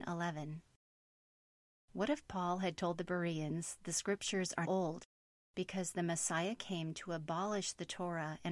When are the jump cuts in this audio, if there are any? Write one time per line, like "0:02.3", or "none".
0:04.6